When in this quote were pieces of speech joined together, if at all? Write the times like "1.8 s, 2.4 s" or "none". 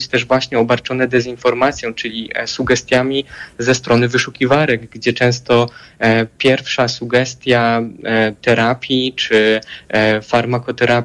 none